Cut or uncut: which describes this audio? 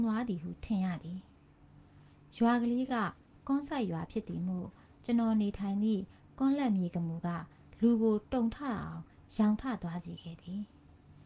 uncut